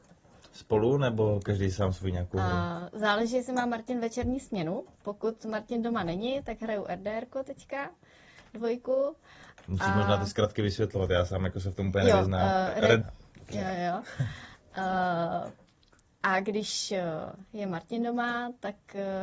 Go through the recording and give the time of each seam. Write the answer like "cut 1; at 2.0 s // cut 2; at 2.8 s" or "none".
cut 1; at 13.0 s